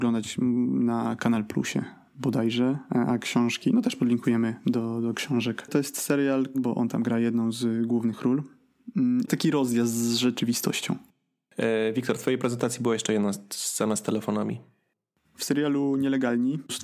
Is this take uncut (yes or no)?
no